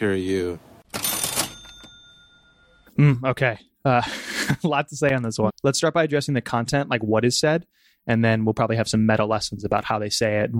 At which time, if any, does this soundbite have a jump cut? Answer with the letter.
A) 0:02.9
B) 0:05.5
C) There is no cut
B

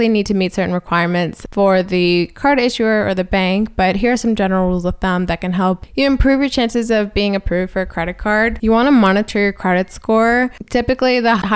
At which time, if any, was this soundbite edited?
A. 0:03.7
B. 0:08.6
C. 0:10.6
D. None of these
D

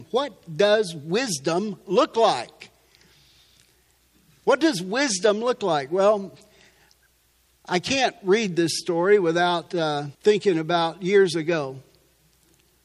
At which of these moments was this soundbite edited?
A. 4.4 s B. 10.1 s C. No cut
B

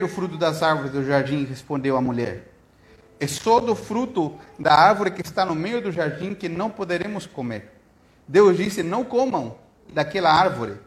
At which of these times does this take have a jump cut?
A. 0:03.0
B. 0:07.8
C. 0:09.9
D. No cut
C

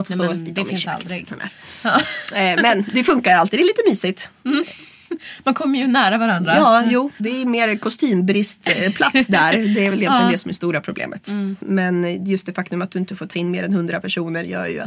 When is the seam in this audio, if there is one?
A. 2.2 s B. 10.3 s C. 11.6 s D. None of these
C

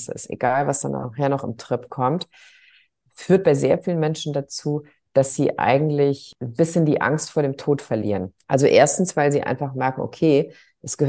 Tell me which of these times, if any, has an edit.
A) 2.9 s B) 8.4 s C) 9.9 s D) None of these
B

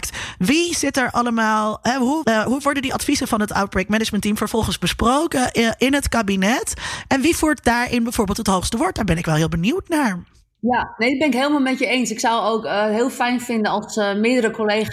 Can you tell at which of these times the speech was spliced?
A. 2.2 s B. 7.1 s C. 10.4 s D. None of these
A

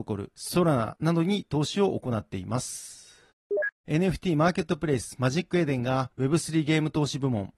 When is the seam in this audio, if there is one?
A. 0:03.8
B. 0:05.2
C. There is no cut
A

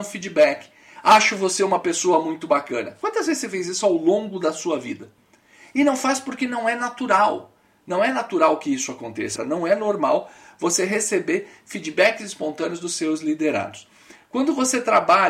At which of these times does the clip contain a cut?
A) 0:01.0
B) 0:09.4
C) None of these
B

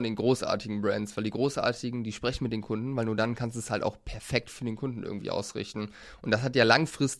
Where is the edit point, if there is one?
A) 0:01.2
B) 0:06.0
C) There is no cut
C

